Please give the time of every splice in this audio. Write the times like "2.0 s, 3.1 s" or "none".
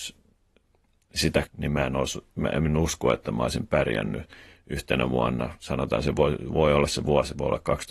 1.5 s

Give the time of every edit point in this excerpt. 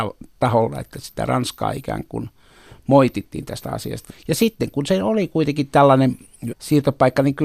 4.1 s, 6.5 s

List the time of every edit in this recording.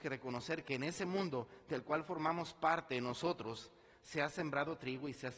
none

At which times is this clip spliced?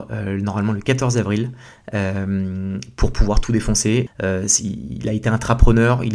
4.1 s

